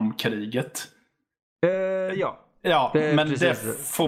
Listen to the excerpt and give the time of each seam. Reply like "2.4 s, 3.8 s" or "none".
none

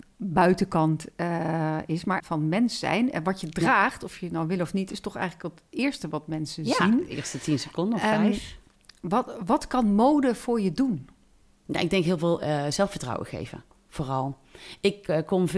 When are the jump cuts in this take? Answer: 2.2 s

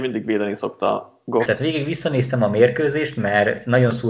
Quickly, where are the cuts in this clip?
1.5 s

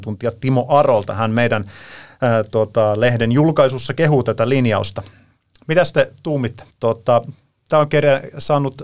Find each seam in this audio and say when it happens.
6.7 s

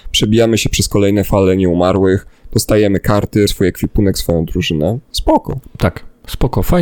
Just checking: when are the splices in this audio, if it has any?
3.5 s

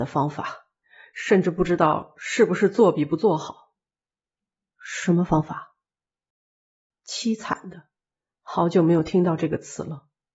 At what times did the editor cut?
none

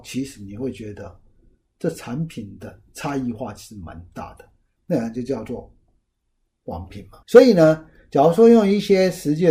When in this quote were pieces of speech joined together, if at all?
4.8 s, 7.2 s

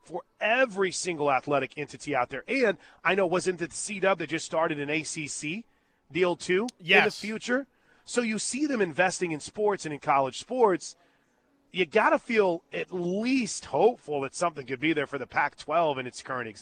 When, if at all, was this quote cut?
none

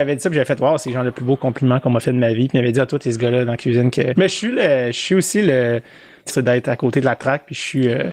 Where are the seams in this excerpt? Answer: 4.2 s, 6.3 s

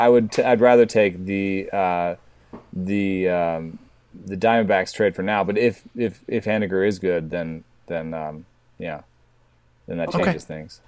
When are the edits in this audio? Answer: none

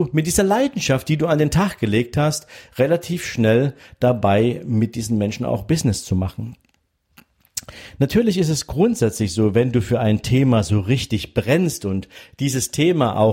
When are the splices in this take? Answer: none

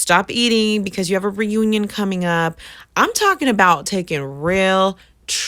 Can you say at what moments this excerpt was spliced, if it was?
none

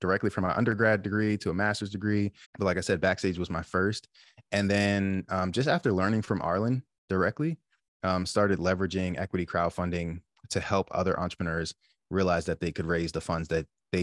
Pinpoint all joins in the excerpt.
2.4 s

